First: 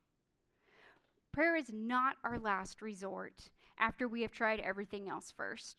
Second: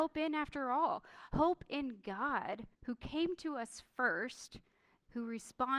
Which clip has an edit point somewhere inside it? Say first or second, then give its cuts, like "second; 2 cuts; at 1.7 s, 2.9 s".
second; 1 cut; at 2.7 s